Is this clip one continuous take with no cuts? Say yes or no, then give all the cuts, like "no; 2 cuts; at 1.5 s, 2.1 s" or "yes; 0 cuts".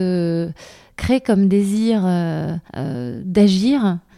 no; 1 cut; at 2.7 s